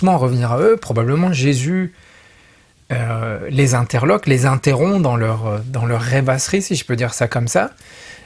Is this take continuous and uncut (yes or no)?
yes